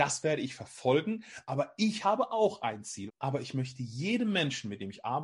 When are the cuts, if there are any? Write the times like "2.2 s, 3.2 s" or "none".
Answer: 3.1 s